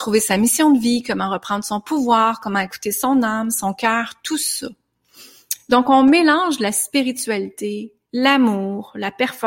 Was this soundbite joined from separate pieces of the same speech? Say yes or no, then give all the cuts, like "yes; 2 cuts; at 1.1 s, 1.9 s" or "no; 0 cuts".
no; 0 cuts